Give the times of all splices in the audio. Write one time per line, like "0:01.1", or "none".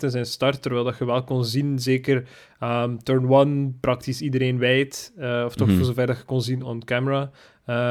0:06.6